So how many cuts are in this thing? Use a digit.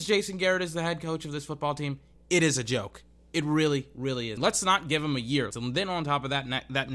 2